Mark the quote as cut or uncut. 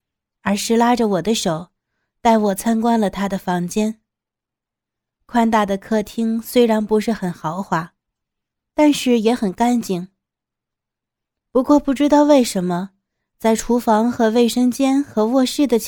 uncut